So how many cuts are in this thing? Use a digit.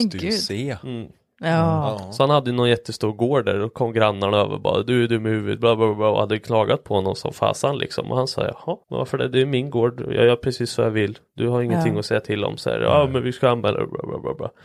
1